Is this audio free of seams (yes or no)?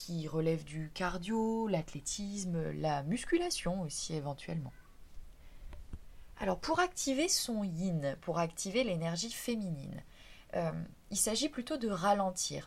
yes